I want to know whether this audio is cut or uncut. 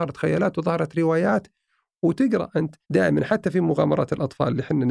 cut